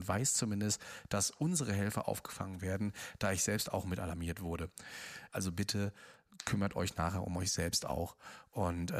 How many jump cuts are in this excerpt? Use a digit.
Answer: 1